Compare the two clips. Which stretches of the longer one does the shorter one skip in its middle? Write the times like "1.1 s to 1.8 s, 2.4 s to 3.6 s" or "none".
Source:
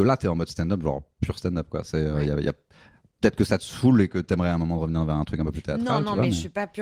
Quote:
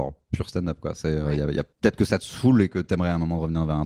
2.6 s to 3.1 s